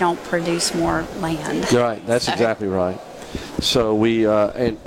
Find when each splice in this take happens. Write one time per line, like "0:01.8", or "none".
none